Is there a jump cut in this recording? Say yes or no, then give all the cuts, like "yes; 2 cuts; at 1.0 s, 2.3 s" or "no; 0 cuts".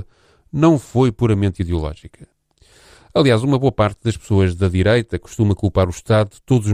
no; 0 cuts